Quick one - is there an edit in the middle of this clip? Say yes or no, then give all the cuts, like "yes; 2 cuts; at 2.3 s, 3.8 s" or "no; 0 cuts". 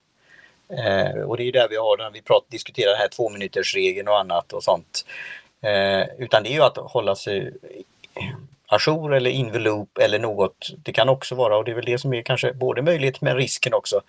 yes; 1 cut; at 1.1 s